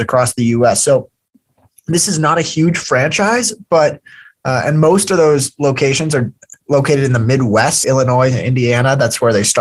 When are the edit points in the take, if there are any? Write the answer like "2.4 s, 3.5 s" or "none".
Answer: 6.6 s, 7.8 s